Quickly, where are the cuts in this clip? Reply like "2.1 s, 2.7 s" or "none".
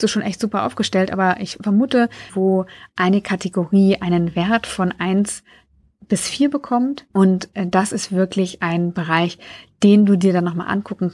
2.3 s, 7.1 s